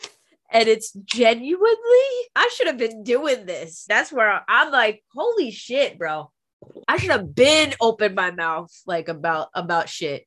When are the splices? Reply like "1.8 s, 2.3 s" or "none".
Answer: 2.3 s, 3.9 s, 6.8 s

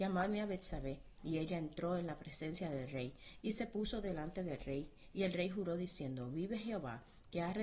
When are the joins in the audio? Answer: none

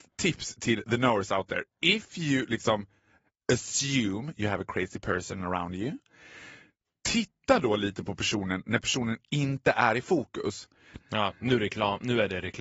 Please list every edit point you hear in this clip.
11.0 s

